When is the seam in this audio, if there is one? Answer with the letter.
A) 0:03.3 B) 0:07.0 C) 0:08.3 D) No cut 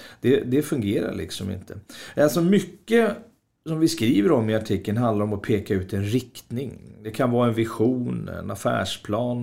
D